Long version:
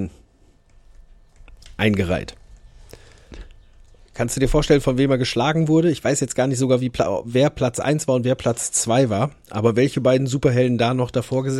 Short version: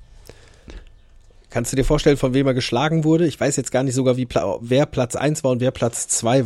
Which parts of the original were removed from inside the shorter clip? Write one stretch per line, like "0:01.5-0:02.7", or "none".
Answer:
none